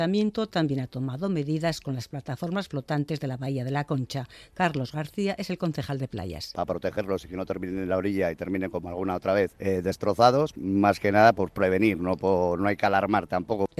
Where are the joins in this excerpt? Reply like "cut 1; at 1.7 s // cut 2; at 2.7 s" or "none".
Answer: cut 1; at 10.5 s